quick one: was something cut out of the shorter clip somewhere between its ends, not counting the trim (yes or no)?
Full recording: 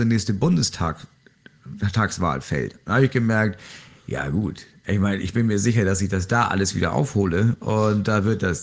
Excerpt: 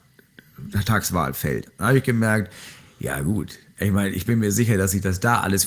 no